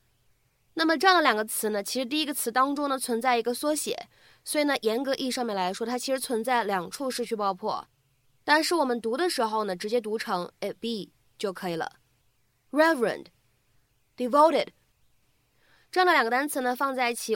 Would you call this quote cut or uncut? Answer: uncut